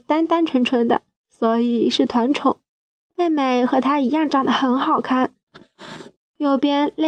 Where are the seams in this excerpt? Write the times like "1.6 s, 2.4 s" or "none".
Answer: 3.1 s, 6.2 s